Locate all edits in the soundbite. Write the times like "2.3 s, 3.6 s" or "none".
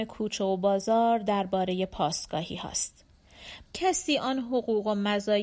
3.6 s